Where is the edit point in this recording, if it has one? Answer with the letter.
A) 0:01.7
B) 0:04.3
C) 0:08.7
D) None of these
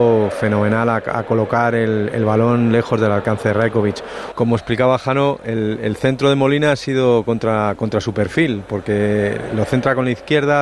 B